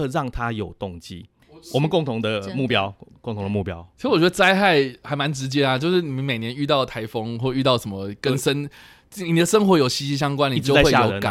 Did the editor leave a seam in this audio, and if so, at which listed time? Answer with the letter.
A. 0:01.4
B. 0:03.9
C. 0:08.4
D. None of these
D